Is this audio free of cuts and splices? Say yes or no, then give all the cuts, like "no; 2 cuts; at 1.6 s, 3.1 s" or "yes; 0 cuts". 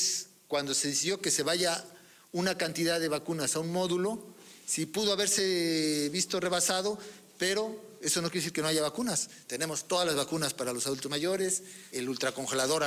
no; 2 cuts; at 9.4 s, 11.9 s